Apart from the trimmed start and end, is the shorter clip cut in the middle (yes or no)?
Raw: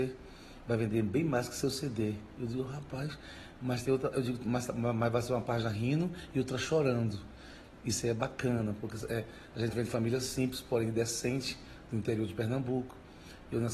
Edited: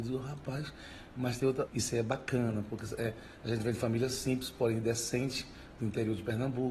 yes